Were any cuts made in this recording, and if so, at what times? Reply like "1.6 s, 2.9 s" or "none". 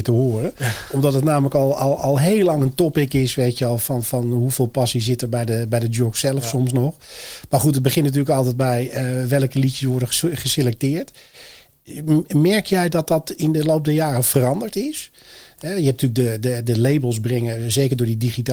none